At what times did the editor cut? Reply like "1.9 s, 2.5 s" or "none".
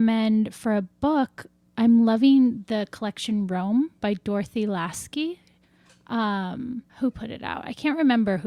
6.9 s